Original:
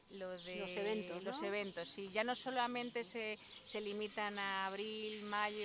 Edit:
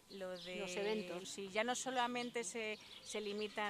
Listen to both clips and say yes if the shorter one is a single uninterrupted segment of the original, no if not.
no